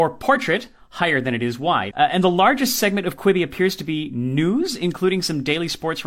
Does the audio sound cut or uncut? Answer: cut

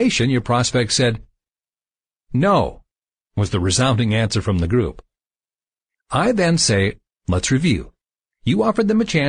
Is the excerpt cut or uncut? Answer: uncut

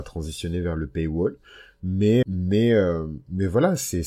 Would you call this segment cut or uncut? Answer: cut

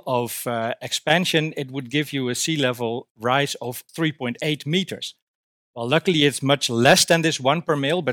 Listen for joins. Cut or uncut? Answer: cut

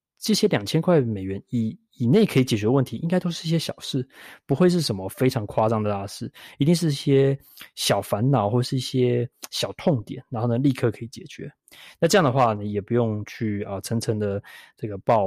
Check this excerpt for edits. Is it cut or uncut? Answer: uncut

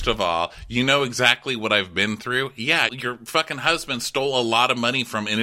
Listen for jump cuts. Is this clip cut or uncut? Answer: cut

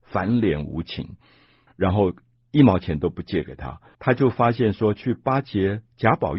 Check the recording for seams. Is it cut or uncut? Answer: cut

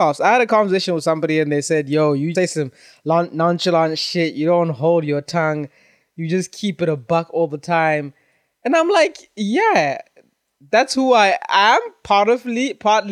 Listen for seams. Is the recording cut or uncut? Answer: cut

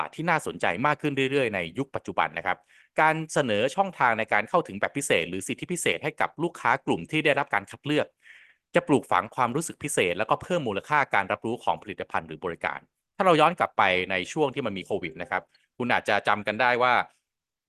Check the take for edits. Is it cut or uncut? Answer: uncut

